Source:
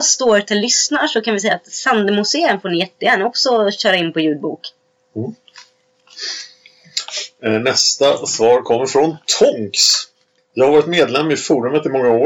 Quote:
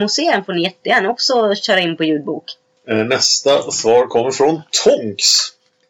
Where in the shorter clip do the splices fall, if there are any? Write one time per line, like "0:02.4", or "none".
0:02.8